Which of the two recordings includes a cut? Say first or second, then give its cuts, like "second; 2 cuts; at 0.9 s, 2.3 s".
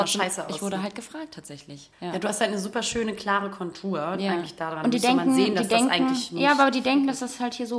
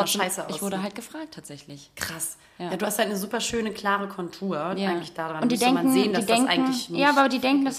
first; 1 cut; at 1.9 s